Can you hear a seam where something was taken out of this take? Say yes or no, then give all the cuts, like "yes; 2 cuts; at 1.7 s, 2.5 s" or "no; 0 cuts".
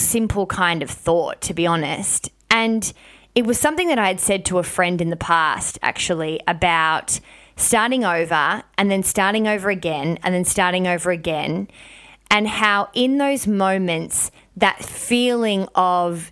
no; 0 cuts